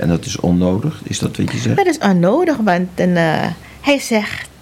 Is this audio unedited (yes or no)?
yes